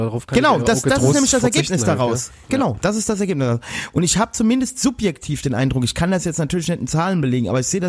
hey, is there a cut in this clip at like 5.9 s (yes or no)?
no